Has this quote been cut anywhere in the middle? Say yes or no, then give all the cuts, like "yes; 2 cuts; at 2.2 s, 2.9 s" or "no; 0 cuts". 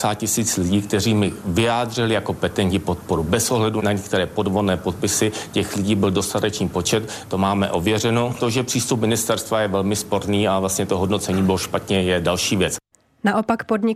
yes; 1 cut; at 8.4 s